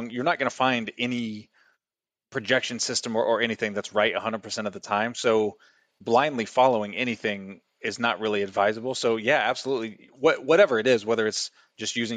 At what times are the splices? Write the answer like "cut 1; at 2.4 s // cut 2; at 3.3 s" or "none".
none